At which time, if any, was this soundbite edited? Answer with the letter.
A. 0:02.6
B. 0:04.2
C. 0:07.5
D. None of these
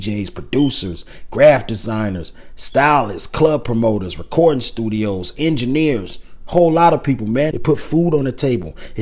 C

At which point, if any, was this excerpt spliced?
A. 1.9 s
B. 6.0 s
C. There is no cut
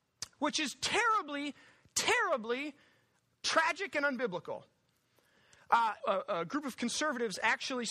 B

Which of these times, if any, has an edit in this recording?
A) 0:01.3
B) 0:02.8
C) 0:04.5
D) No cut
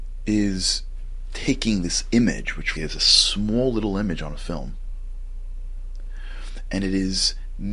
B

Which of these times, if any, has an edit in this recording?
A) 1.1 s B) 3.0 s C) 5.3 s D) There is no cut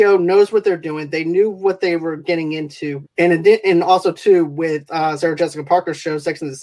B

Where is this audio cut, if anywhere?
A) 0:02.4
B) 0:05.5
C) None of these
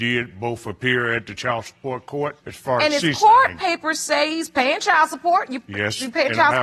A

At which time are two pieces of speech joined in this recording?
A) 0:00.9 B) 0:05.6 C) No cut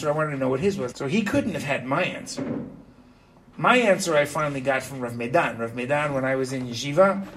A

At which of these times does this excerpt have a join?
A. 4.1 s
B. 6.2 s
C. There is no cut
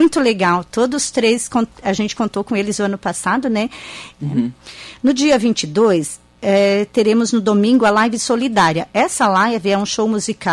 A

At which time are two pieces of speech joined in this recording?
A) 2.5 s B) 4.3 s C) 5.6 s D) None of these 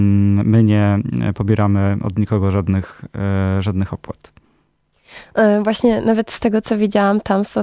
D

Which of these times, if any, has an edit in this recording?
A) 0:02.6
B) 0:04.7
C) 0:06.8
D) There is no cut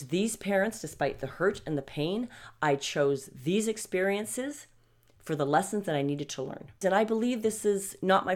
C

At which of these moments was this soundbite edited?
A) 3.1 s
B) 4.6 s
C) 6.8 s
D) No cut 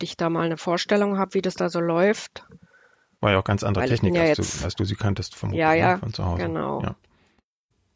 D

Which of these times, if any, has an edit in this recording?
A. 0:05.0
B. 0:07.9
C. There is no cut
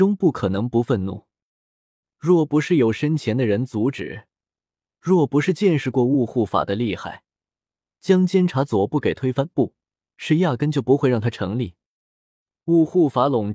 B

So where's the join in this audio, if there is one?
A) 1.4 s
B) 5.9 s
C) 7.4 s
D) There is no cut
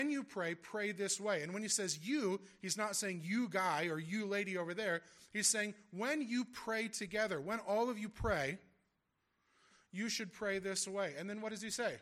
D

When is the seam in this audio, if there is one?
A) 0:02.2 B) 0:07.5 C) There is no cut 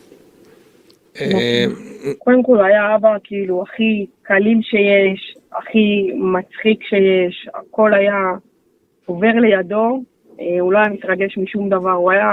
A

